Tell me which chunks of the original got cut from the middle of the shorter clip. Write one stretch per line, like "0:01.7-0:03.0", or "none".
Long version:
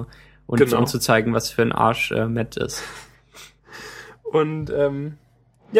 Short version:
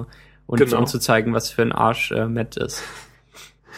none